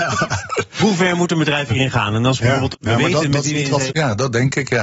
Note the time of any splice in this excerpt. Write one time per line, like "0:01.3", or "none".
0:02.7
0:03.9